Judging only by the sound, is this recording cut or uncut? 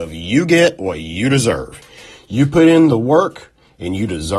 uncut